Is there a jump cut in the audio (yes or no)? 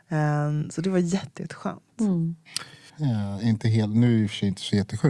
yes